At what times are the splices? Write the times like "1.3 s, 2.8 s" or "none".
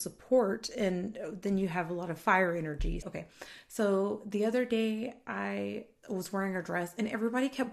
3.0 s, 6.0 s